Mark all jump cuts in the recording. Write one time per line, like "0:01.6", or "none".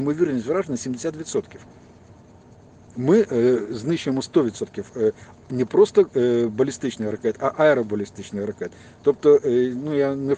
none